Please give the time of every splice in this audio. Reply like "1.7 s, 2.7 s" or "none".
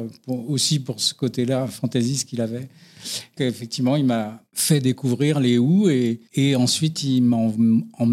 3.4 s, 6.3 s